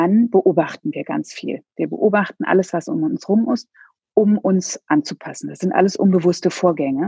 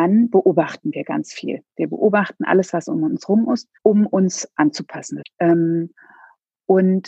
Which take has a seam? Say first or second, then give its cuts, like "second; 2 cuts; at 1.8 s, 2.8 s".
second; 2 cuts; at 3.8 s, 5.2 s